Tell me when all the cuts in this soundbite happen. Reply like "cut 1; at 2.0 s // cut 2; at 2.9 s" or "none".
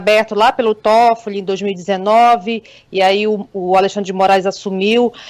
none